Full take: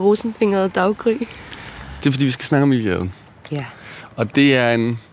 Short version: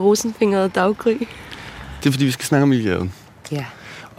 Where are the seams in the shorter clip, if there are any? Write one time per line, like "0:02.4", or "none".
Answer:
none